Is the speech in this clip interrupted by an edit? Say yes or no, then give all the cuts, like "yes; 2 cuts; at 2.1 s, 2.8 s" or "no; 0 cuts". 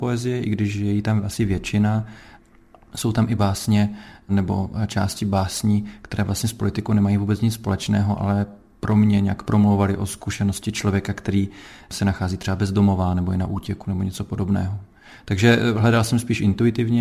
no; 0 cuts